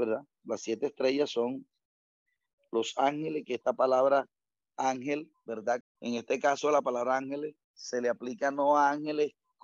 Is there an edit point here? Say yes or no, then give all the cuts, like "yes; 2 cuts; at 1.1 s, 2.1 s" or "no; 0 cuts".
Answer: yes; 2 cuts; at 5.8 s, 7.6 s